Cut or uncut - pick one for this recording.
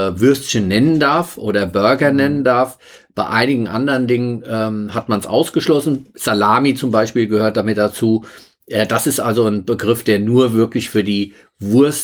uncut